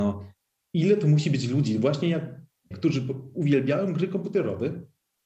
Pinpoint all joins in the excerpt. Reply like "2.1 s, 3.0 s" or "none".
2.7 s